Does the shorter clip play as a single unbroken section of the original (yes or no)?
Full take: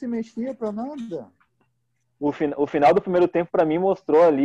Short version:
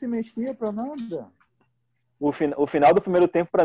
yes